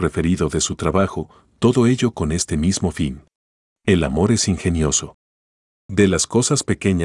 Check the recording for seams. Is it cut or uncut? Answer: cut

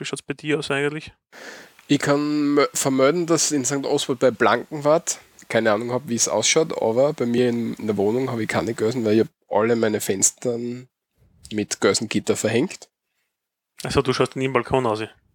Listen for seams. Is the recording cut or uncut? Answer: uncut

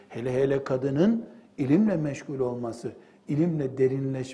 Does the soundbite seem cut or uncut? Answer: uncut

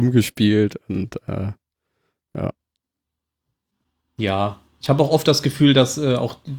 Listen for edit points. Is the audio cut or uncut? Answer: uncut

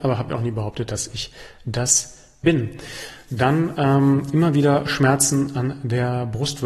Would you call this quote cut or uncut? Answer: cut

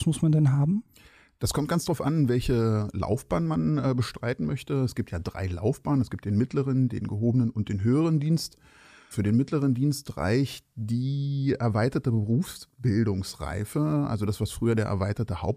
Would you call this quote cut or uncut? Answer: cut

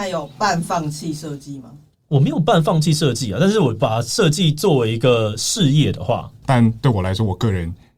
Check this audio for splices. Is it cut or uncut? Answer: cut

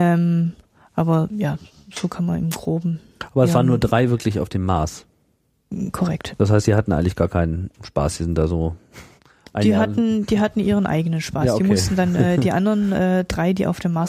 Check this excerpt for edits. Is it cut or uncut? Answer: cut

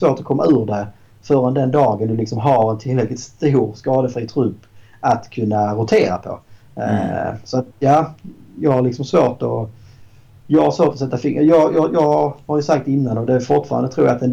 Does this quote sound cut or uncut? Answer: uncut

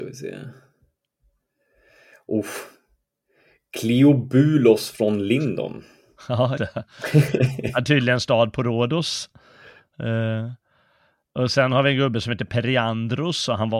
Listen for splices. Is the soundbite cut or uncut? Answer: cut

